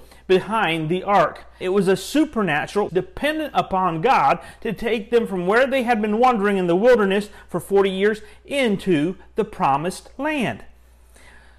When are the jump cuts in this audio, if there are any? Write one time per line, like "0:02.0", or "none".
0:01.6
0:02.9